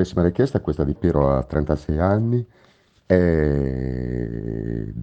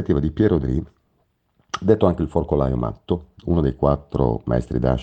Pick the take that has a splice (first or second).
first